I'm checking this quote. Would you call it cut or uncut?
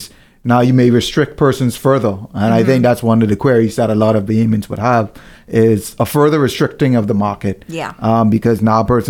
uncut